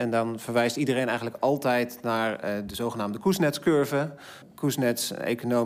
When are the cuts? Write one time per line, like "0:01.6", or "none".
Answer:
0:04.4